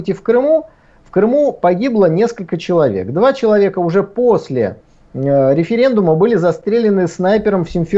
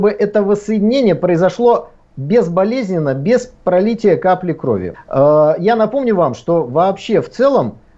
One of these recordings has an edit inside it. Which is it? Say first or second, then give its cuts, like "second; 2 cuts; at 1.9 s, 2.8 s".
second; 1 cut; at 4.9 s